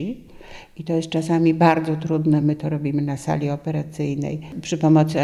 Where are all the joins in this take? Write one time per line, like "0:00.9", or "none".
none